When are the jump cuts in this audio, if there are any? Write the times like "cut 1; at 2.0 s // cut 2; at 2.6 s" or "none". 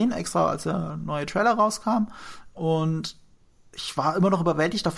cut 1; at 2.5 s